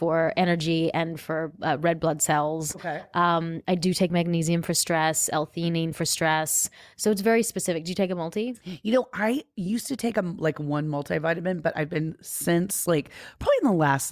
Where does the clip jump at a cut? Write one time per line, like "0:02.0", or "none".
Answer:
none